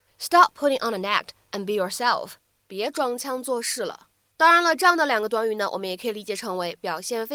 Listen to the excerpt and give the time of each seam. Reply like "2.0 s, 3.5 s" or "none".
4.3 s